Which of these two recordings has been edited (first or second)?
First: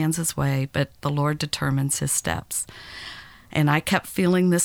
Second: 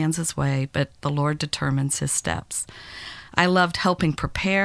second